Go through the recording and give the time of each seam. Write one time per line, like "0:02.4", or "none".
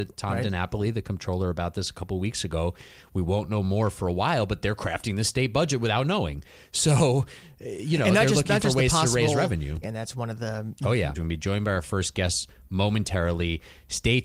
0:09.8
0:11.1